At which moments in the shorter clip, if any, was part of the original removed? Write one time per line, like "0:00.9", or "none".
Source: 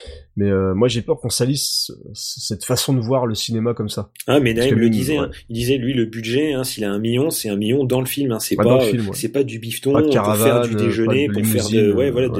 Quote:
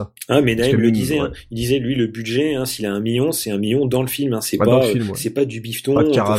none